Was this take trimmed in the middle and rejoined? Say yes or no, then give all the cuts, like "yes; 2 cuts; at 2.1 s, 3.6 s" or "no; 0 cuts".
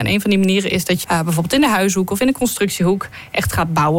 yes; 1 cut; at 1.0 s